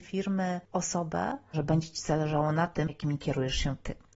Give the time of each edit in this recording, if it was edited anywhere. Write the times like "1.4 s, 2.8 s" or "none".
1.5 s, 2.9 s